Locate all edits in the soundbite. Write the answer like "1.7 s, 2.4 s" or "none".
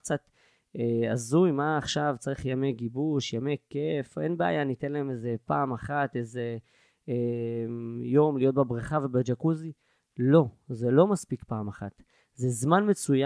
none